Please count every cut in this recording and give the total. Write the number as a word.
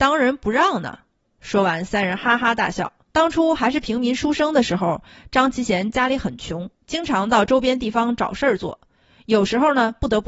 two